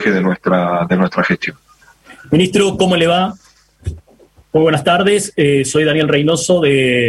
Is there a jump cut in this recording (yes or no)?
no